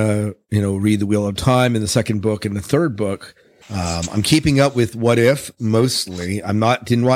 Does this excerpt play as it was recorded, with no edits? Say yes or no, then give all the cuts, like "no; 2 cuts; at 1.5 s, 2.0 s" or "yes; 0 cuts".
no; 1 cut; at 3.6 s